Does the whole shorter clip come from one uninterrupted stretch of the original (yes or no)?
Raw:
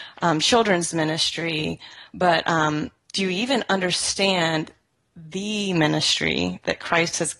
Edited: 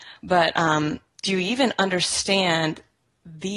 yes